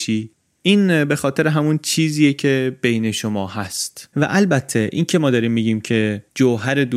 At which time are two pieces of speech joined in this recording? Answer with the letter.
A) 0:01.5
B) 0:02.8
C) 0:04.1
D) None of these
C